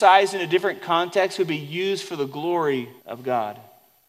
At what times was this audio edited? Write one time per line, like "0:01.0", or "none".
0:03.0